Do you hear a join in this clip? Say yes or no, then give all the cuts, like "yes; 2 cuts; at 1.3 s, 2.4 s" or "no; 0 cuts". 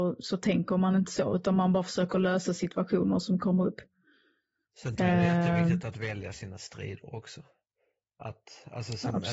no; 0 cuts